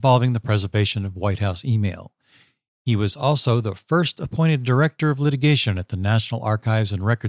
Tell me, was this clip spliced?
no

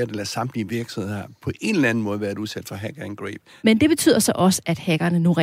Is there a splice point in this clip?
yes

